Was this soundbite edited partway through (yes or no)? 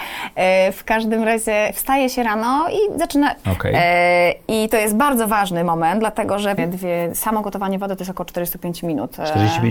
yes